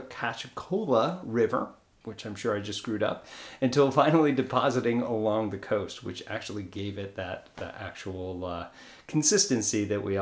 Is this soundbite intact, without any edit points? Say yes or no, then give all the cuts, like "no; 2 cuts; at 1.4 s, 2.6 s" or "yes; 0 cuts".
yes; 0 cuts